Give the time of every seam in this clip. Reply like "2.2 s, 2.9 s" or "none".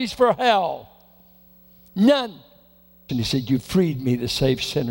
3.1 s